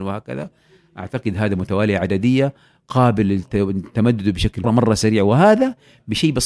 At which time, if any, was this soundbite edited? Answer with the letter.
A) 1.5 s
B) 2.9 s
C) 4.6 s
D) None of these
C